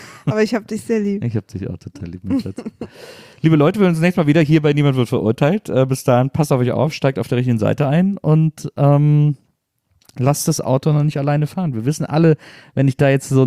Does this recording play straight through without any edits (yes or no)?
yes